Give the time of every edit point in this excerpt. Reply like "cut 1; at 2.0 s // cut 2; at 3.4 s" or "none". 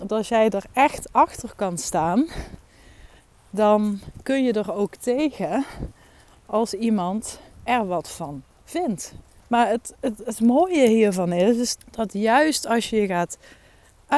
cut 1; at 9.4 s // cut 2; at 11.8 s